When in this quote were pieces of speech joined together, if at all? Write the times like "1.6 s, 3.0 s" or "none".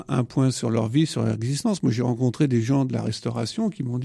none